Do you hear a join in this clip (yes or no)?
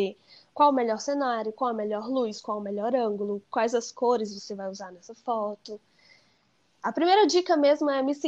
no